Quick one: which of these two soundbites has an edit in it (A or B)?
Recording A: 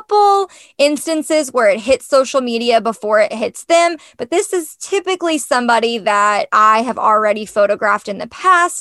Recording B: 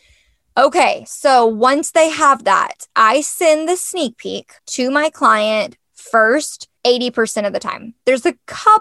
B